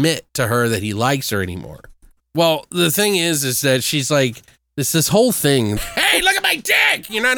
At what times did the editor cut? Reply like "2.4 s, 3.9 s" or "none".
2.2 s, 5.8 s